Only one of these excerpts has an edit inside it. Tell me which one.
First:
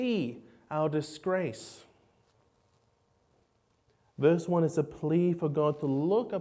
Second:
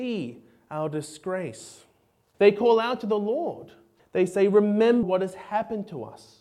second; 3 cuts; at 2.3 s, 4.0 s, 5.0 s

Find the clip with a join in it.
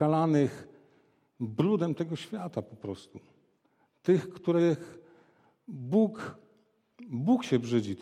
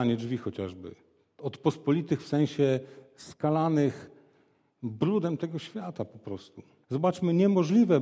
second; 1 cut; at 6.8 s

